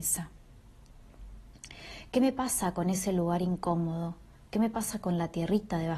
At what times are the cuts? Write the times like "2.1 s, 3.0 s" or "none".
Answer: none